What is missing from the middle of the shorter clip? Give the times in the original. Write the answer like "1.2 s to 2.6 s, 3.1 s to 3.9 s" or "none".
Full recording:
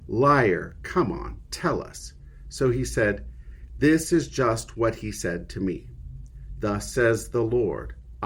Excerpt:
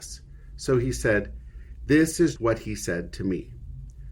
4.3 s to 4.7 s